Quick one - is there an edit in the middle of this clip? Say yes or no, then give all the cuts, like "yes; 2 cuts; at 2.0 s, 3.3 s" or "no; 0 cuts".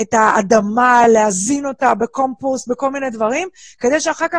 no; 0 cuts